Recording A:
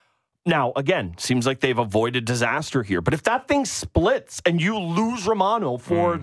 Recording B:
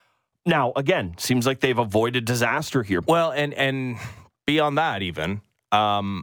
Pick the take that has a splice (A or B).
B